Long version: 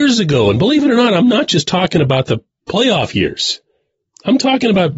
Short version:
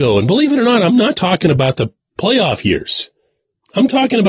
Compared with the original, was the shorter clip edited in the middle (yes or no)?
yes